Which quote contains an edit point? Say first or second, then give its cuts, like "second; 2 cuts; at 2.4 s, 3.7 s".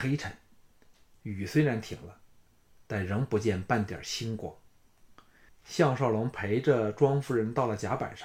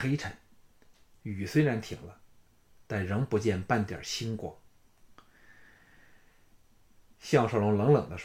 first; 1 cut; at 5.5 s